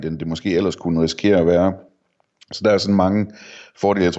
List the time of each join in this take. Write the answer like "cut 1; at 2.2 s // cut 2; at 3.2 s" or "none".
none